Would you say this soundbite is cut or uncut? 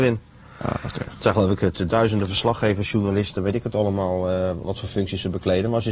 cut